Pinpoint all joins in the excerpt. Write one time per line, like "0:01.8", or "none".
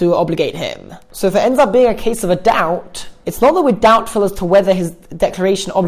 none

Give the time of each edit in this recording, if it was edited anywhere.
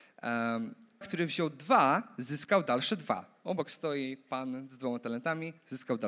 0:01.0

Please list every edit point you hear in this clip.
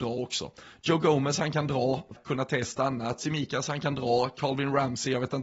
0:02.1

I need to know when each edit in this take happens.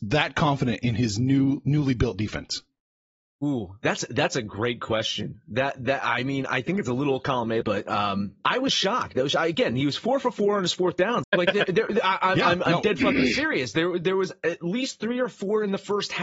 0:07.6
0:11.2

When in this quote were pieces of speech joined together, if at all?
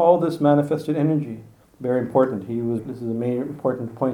0:01.6
0:02.8

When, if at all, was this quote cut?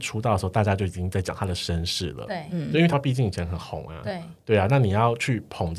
0:02.9

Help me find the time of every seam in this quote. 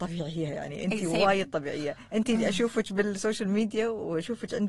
none

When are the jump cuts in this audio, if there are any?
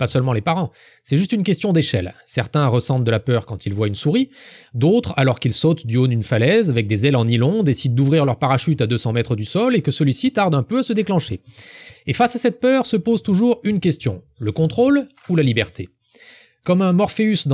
none

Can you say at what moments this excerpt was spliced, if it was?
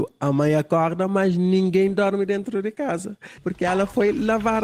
0:03.4

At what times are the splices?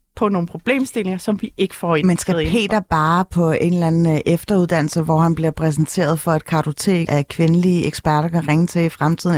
0:07.1

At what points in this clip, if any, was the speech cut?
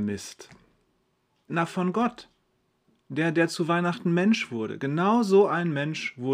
0:01.5

